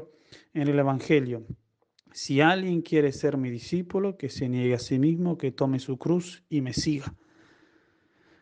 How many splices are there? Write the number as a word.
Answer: zero